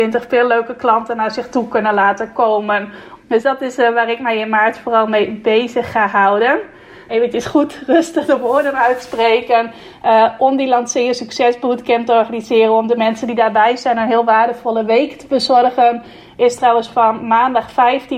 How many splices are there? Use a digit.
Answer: 2